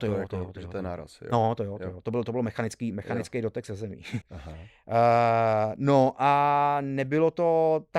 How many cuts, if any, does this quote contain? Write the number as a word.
one